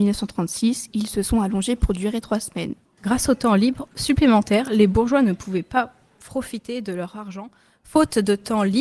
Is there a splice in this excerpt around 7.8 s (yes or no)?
no